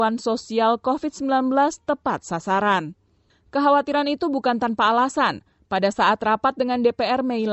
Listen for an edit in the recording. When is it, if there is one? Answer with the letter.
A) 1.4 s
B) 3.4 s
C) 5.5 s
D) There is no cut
D